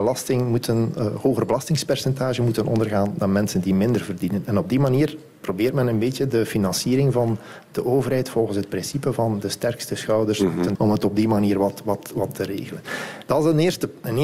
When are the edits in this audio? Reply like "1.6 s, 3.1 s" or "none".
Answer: 10.7 s